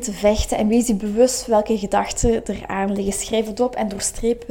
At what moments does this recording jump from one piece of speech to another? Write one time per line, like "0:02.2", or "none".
none